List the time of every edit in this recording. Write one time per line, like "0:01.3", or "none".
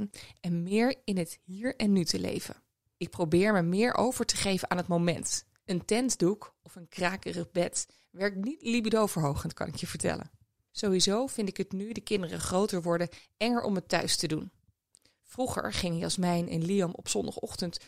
0:05.6